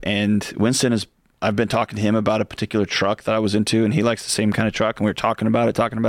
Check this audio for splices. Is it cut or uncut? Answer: uncut